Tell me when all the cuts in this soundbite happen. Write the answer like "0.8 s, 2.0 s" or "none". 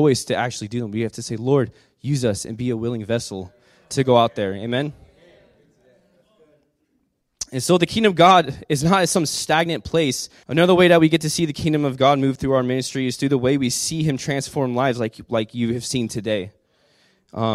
10.4 s